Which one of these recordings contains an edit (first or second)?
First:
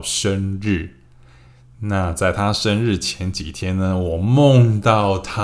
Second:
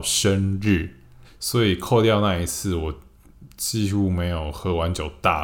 second